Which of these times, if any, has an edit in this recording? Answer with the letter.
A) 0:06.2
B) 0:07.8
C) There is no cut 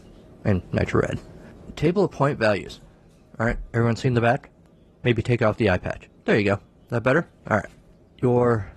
A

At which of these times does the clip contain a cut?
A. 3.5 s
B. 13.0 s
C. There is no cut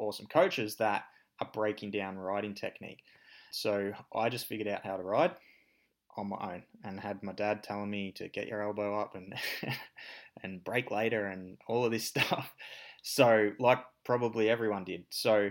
A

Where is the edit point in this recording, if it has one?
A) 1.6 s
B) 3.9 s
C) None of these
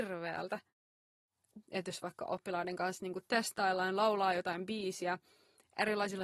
A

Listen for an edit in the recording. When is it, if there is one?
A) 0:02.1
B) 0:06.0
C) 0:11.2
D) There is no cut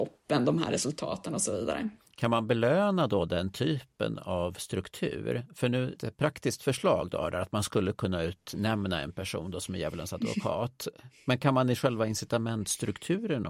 B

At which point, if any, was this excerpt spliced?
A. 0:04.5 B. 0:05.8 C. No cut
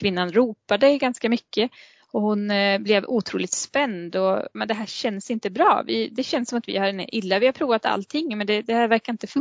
A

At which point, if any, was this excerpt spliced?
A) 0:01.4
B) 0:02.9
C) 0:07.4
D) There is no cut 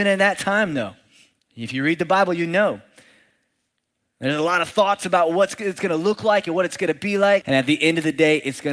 C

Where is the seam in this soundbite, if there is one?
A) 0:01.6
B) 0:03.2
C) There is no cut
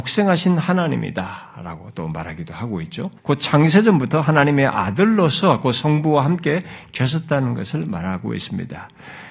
B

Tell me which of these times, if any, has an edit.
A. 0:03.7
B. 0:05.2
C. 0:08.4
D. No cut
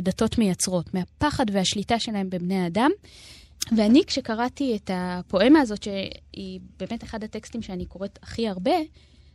D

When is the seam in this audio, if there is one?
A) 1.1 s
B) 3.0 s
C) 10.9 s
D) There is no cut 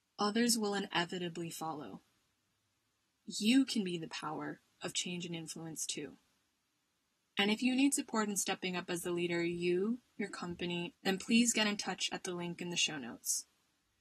C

